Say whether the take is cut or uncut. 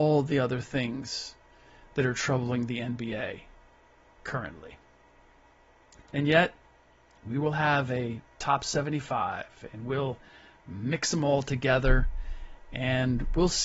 cut